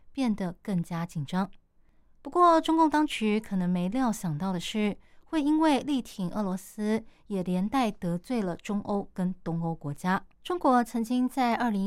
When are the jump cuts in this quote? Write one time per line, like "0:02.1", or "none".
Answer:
0:10.3